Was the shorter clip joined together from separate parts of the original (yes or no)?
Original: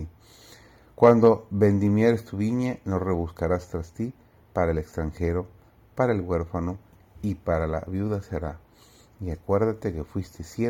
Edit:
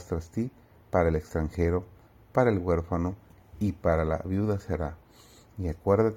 no